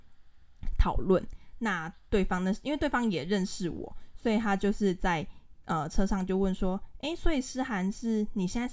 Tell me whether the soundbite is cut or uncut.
uncut